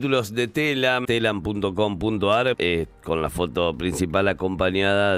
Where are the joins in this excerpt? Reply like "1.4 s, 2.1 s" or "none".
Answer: 1.0 s, 2.5 s